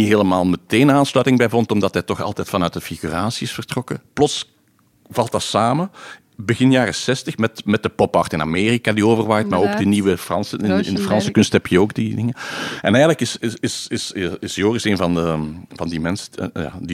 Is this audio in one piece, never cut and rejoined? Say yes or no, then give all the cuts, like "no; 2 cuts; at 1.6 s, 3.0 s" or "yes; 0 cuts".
yes; 0 cuts